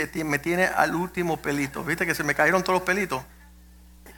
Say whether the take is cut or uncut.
uncut